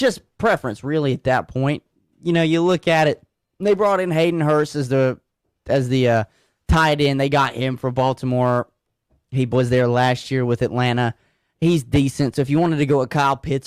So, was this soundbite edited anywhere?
no; 0 cuts

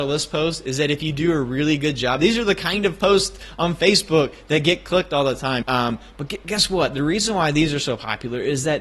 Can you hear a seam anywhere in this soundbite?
yes; 1 cut; at 5.6 s

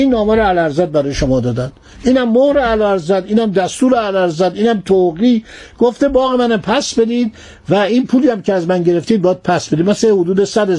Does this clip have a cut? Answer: no; 0 cuts

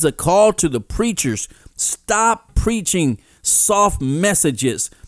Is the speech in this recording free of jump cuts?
yes; 0 cuts

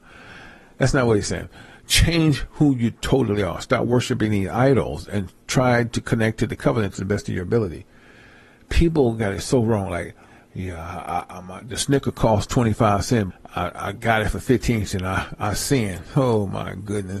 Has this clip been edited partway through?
yes; 1 cut; at 13.3 s

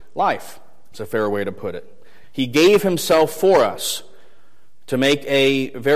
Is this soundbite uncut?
no; 2 cuts; at 0.9 s, 2.2 s

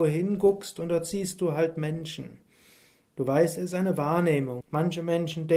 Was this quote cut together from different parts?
yes; 1 cut; at 4.6 s

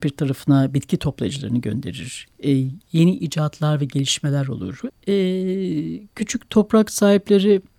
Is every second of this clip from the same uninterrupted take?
no; 1 cut; at 4.9 s

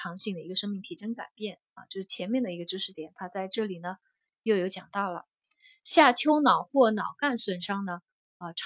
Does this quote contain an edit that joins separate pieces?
no; 0 cuts

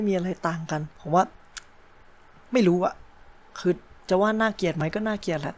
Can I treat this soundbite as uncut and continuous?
no; 1 cut; at 0.9 s

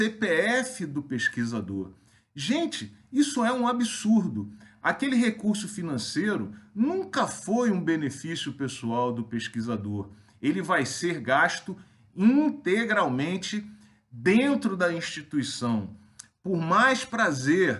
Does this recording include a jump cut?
no; 0 cuts

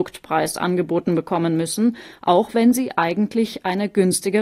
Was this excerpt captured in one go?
yes; 0 cuts

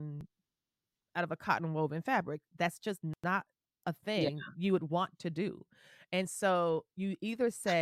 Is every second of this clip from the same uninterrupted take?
yes; 0 cuts

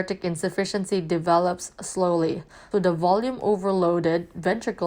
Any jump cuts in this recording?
yes; 1 cut; at 2.7 s

